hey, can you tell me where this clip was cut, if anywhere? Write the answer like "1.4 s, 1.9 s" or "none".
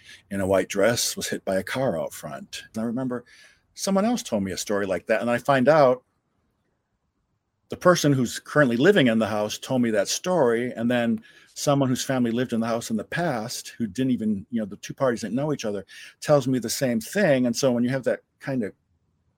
2.7 s